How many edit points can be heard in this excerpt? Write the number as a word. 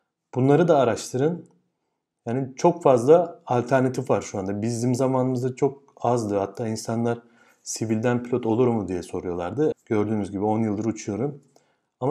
one